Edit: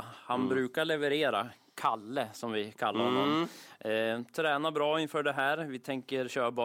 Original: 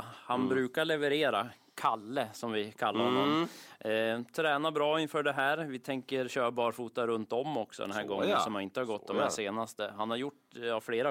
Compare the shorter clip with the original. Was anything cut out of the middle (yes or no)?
no